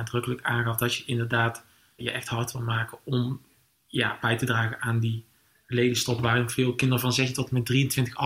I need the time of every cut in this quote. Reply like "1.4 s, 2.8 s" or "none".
2.0 s